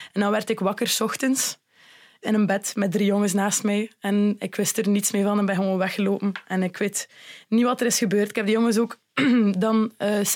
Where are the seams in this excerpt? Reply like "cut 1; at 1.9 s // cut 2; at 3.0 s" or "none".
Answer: none